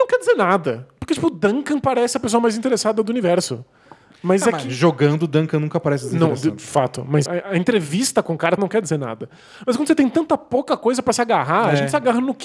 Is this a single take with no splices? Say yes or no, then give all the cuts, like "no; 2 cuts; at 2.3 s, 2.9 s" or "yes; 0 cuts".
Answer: no; 2 cuts; at 7.3 s, 8.6 s